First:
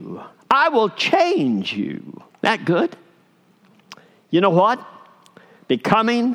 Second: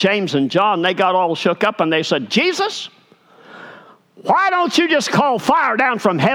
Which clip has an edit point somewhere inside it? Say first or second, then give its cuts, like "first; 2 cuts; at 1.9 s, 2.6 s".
first; 1 cut; at 2.3 s